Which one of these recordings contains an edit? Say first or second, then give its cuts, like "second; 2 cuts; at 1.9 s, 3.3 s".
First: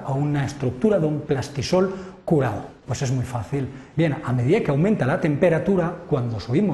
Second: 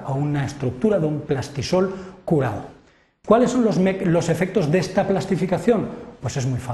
first; 2 cuts; at 2.8 s, 3.9 s